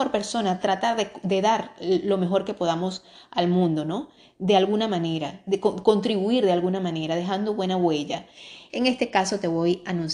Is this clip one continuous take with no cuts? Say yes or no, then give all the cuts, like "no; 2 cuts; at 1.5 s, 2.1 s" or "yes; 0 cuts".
no; 1 cut; at 8.7 s